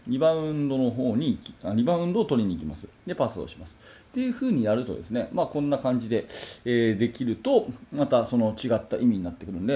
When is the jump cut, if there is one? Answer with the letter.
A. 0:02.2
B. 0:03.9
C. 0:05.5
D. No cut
D